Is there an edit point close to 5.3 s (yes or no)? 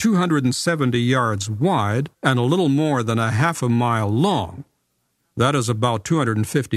no